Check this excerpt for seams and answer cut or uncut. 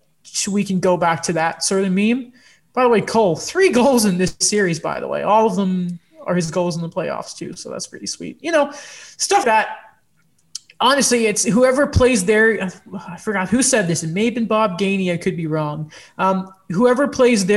cut